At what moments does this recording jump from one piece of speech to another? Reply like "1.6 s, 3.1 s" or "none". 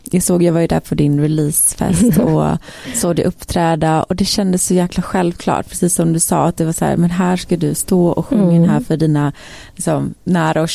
none